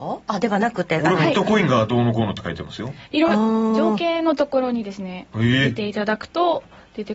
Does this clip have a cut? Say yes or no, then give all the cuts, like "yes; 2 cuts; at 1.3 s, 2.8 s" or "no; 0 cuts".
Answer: no; 0 cuts